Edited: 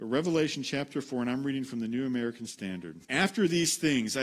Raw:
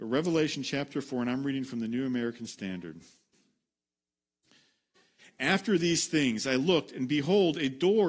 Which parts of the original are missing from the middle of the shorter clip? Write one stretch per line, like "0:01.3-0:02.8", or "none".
0:03.0-0:05.3